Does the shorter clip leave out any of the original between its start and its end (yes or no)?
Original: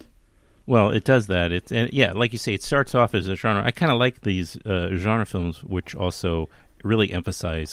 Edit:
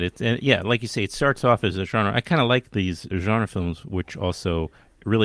yes